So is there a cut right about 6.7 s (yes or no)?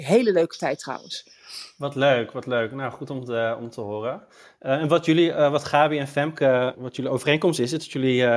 yes